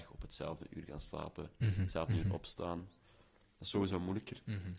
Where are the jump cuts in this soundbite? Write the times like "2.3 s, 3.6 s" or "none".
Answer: none